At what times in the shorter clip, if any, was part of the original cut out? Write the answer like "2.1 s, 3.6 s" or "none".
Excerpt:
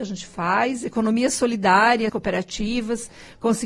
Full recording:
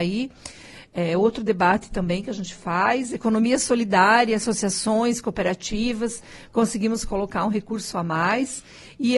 2.1 s